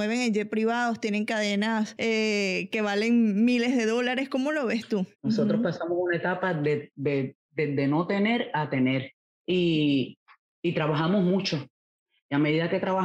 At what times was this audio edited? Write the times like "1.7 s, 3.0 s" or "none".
5.1 s, 9.4 s